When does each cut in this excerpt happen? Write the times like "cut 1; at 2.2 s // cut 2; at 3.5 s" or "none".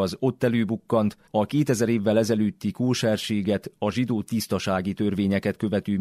cut 1; at 1.3 s